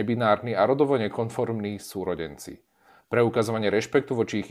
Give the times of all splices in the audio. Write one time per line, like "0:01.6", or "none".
none